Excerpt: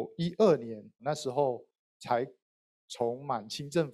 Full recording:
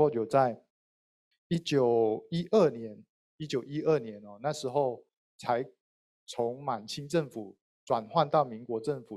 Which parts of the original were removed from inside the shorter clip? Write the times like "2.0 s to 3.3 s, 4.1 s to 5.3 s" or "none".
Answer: 3.1 s to 4.4 s